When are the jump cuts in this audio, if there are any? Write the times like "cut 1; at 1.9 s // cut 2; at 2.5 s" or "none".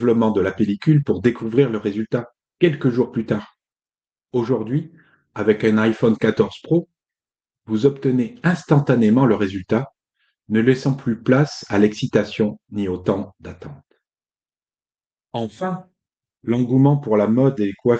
cut 1; at 15.1 s